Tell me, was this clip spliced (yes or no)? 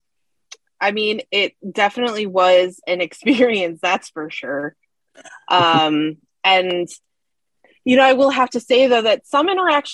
no